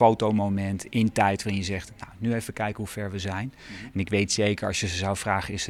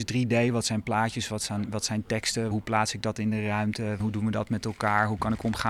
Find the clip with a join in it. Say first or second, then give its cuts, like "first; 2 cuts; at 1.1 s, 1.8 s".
second; 2 cuts; at 2.5 s, 4.0 s